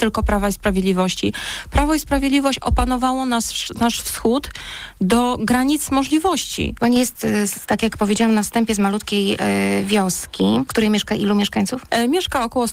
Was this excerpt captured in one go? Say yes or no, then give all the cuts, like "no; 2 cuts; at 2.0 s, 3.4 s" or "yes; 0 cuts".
yes; 0 cuts